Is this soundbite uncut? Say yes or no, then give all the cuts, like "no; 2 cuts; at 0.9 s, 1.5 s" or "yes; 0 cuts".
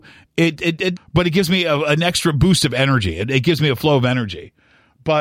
no; 1 cut; at 1.0 s